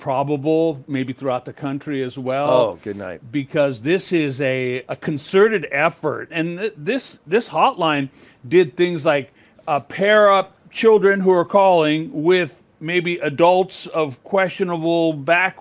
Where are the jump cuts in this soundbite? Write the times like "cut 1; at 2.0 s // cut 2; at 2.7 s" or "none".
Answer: cut 1; at 4.8 s // cut 2; at 6.3 s // cut 3; at 10.6 s